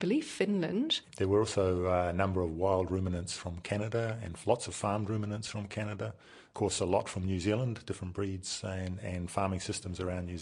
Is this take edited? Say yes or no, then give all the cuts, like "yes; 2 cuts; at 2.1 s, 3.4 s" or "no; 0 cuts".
yes; 1 cut; at 1.0 s